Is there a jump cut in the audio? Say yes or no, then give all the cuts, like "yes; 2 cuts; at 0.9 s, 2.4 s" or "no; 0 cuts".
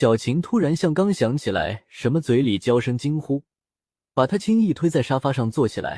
yes; 1 cut; at 4.4 s